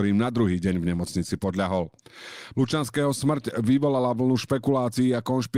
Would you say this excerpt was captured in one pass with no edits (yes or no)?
no